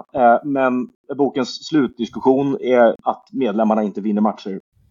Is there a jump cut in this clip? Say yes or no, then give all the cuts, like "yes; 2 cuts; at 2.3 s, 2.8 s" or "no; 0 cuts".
yes; 1 cut; at 2.9 s